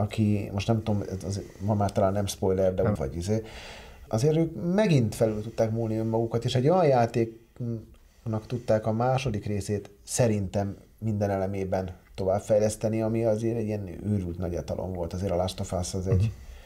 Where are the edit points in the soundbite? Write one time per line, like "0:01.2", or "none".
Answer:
0:03.0
0:04.1